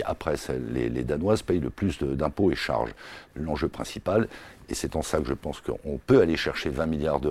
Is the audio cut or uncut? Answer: cut